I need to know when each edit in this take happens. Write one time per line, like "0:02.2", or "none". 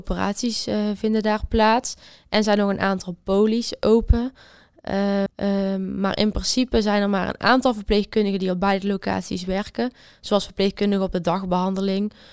0:05.3